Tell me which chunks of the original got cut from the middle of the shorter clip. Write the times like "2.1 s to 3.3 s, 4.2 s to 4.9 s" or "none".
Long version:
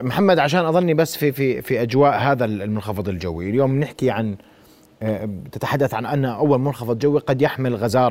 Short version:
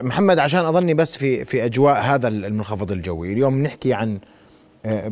1.2 s to 1.3 s